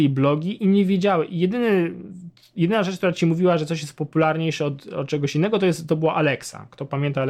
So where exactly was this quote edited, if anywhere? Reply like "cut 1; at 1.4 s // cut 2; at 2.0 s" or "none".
none